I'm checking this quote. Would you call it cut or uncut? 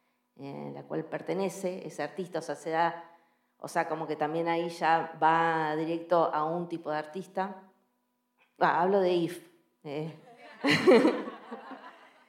cut